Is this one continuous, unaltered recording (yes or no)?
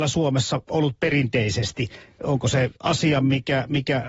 no